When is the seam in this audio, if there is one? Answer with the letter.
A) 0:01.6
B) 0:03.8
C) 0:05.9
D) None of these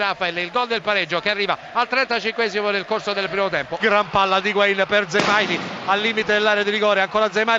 B